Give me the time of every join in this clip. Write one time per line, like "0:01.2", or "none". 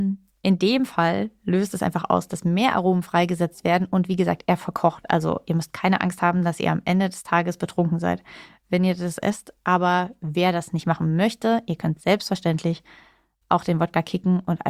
none